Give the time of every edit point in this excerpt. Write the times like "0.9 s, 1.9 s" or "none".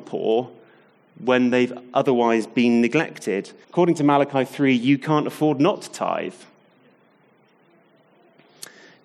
3.6 s